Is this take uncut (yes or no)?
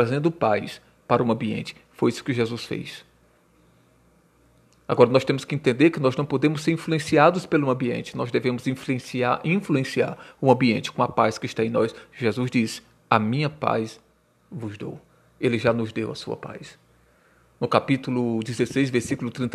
yes